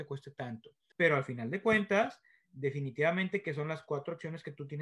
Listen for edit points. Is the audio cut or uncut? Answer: cut